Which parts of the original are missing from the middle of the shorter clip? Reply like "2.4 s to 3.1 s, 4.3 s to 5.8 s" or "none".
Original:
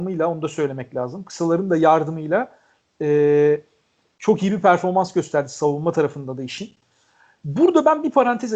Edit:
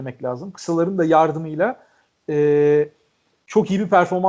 none